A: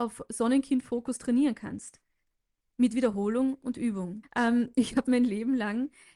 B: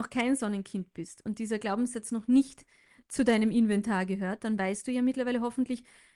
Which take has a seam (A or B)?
A